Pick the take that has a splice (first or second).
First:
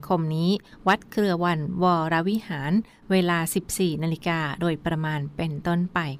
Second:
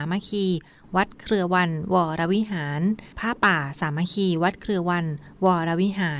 second